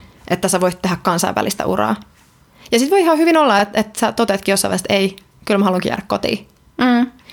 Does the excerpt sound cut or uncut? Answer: uncut